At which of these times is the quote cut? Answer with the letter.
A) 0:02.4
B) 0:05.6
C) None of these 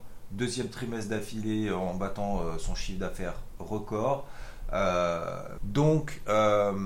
B